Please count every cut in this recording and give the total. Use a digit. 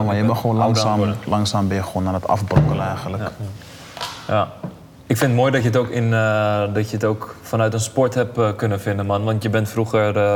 0